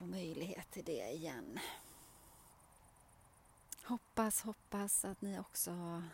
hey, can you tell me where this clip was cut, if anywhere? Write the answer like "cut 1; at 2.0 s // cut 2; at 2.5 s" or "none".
cut 1; at 3.8 s